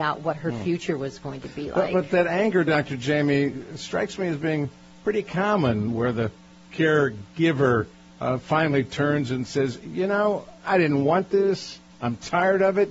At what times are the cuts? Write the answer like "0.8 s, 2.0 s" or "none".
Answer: none

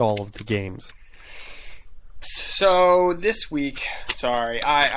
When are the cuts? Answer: 2.2 s

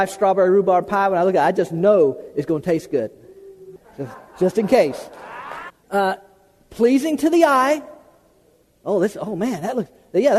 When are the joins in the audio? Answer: 5.7 s

